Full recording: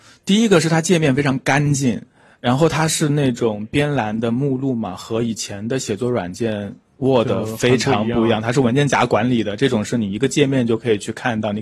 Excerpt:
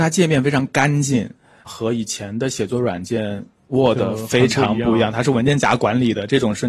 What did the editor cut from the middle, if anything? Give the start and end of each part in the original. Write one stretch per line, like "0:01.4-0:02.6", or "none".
0:02.4-0:05.0